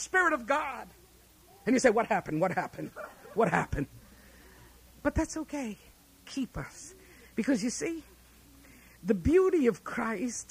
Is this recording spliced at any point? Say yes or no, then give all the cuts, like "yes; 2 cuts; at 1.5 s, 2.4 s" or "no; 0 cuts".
yes; 1 cut; at 1.6 s